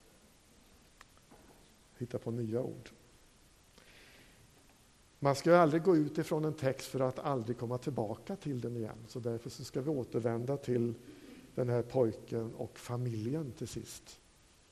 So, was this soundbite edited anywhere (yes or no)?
no